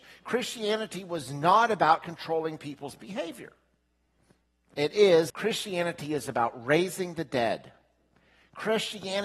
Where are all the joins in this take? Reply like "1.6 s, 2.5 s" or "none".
5.3 s